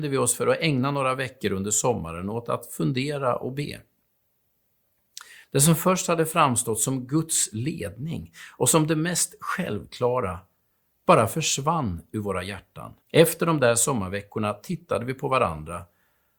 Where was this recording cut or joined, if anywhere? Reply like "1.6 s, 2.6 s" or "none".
5.4 s, 13.0 s